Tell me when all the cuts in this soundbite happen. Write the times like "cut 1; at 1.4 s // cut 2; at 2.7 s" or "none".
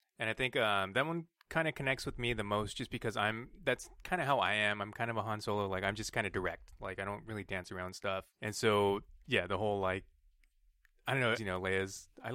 cut 1; at 8.3 s // cut 2; at 11.3 s